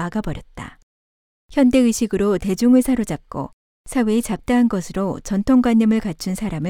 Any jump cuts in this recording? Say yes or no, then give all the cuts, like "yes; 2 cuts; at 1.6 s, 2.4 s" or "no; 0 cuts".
yes; 1 cut; at 1.3 s